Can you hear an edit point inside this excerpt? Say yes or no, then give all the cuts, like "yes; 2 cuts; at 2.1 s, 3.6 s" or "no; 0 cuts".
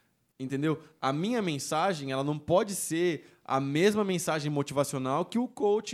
no; 0 cuts